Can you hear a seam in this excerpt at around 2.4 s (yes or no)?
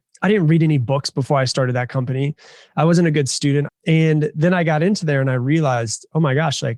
no